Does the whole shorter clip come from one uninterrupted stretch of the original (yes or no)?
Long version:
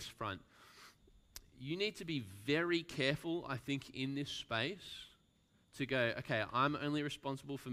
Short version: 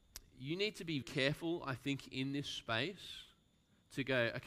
no